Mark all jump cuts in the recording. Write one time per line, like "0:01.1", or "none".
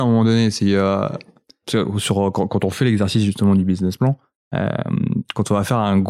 0:01.6